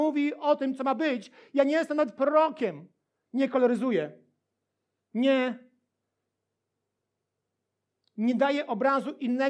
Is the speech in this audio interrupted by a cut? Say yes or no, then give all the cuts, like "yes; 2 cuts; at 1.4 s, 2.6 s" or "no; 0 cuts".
yes; 1 cut; at 3.3 s